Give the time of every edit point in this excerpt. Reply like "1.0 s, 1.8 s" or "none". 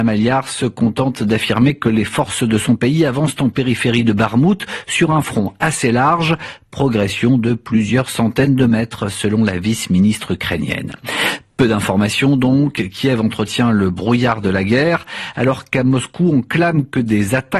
none